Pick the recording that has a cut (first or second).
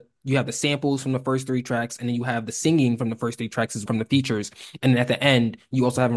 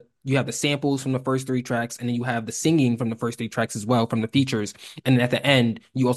first